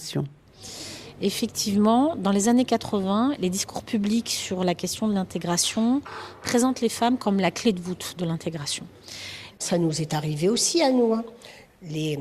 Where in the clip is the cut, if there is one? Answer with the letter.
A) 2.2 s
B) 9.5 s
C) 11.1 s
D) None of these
B